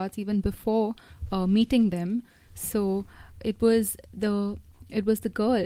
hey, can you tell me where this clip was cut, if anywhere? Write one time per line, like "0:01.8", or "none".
0:03.4